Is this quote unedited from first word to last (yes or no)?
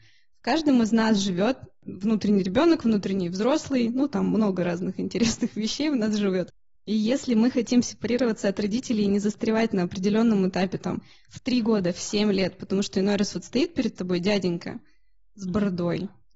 no